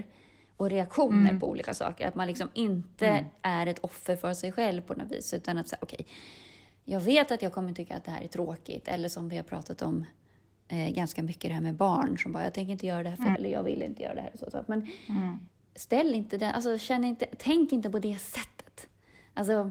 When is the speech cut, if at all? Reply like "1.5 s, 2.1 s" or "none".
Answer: 13.4 s